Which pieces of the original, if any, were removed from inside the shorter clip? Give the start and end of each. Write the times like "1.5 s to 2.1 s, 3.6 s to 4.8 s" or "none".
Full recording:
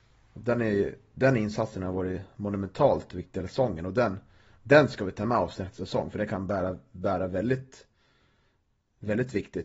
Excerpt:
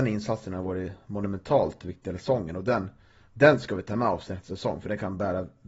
none